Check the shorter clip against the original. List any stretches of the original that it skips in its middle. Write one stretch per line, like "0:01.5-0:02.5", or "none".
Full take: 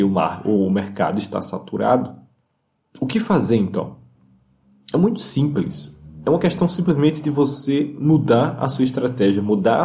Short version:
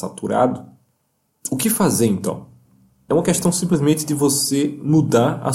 0:04.6-0:06.2